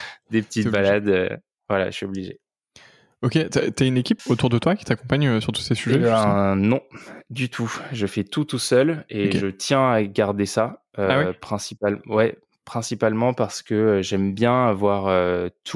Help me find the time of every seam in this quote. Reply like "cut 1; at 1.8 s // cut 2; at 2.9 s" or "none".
cut 1; at 4.2 s